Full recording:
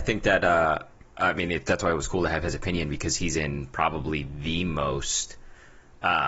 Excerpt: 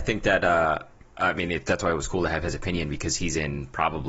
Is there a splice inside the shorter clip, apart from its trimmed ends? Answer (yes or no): no